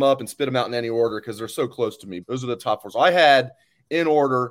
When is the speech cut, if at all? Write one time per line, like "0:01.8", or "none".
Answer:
0:02.2